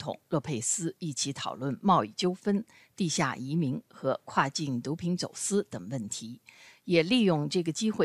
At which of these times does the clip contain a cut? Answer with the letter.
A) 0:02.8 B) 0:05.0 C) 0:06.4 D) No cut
D